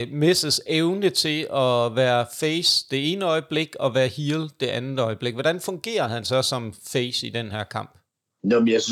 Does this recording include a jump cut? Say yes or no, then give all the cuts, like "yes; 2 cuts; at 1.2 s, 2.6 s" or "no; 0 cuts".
no; 0 cuts